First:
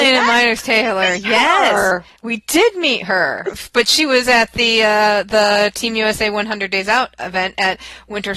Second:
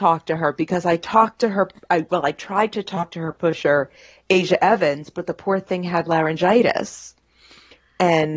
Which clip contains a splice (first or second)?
first